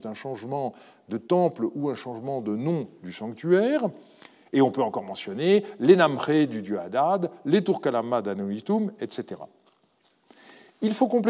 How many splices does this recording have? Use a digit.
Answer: 0